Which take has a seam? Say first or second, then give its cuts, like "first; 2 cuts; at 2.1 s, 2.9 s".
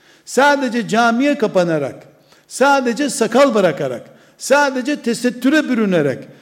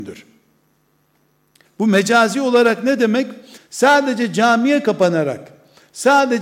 second; 2 cuts; at 1.6 s, 3.6 s